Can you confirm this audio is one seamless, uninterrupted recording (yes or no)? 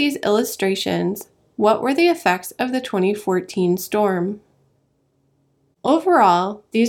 no